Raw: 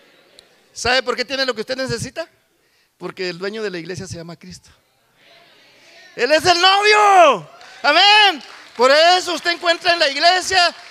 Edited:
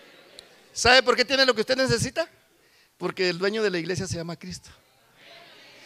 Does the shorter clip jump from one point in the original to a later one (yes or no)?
no